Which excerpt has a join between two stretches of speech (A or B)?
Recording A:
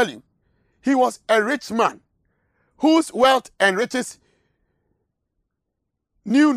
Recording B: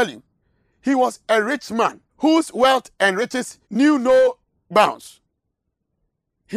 B